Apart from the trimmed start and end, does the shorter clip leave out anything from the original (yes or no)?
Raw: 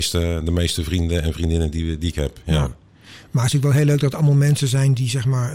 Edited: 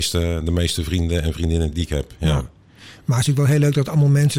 yes